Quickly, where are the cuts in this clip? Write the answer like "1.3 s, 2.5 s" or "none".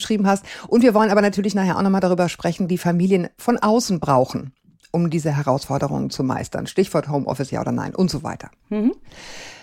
2.7 s